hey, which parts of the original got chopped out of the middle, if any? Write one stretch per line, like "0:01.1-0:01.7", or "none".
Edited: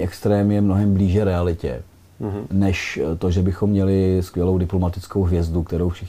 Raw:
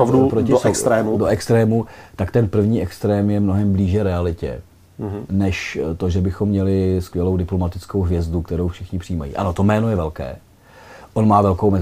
none